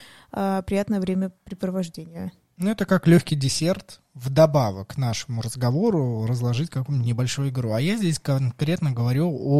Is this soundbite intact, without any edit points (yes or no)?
yes